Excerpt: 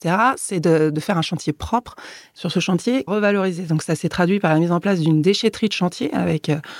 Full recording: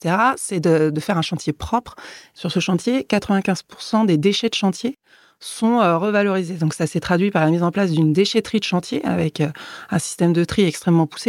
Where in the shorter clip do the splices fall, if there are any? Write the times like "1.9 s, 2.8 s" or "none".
3.1 s